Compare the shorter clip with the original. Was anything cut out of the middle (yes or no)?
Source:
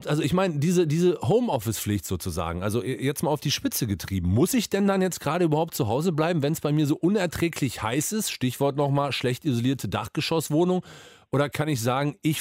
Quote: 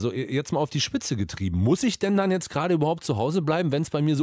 no